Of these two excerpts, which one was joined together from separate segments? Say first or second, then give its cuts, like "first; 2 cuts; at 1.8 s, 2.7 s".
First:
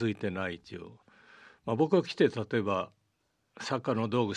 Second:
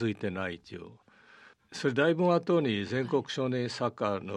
second; 1 cut; at 1.5 s